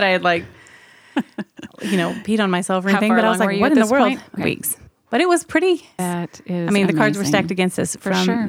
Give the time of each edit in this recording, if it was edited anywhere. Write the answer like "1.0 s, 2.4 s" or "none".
4.4 s, 6.0 s